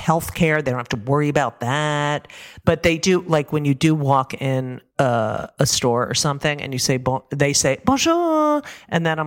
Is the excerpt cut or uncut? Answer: cut